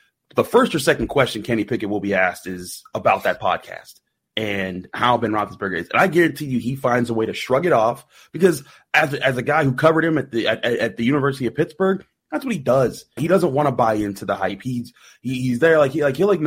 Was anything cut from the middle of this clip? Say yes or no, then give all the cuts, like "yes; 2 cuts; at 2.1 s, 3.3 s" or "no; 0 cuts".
yes; 1 cut; at 13.2 s